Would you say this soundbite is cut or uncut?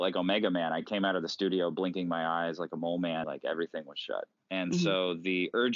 cut